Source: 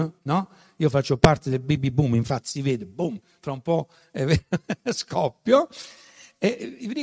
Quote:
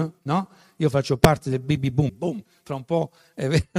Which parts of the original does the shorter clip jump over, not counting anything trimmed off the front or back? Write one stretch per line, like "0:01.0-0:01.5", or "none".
0:02.1-0:02.9